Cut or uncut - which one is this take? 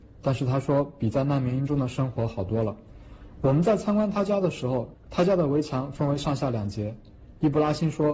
uncut